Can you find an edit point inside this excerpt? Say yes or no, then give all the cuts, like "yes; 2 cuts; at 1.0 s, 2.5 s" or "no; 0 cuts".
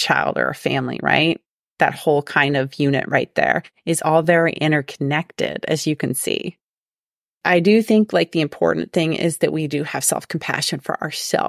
no; 0 cuts